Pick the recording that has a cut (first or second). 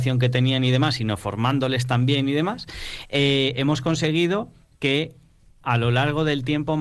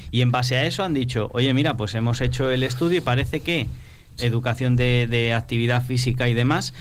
second